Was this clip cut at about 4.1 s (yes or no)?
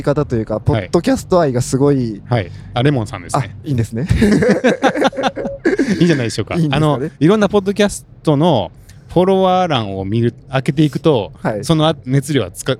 no